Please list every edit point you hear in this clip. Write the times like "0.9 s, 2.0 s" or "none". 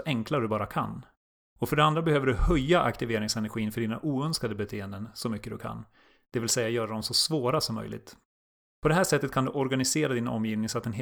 none